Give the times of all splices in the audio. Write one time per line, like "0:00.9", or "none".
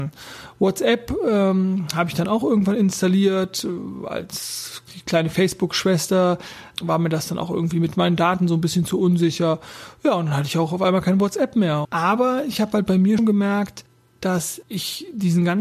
0:11.8
0:13.2